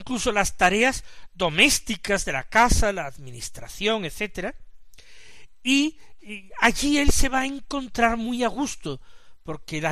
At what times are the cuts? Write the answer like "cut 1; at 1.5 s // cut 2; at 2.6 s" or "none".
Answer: none

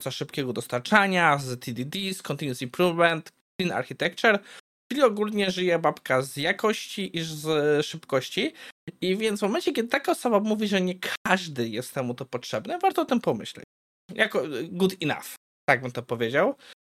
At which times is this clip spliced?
cut 1; at 14.0 s

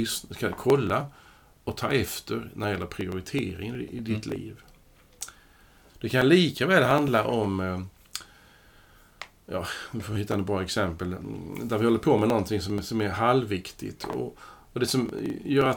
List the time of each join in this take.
cut 1; at 5.9 s

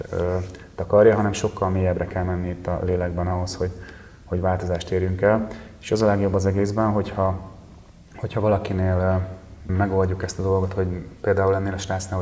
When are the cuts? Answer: cut 1; at 9.7 s

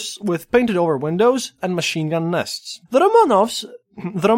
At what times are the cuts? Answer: cut 1; at 1.6 s // cut 2; at 2.9 s

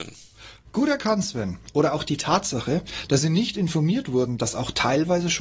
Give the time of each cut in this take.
cut 1; at 3.1 s

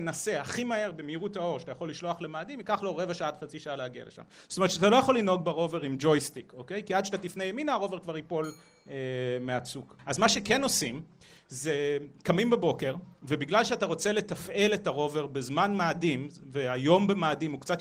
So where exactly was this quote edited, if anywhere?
none

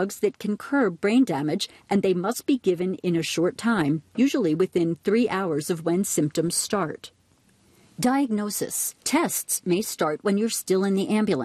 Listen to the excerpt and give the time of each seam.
cut 1; at 9.0 s

